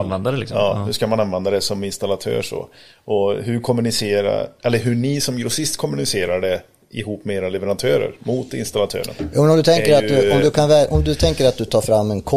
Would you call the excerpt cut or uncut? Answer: uncut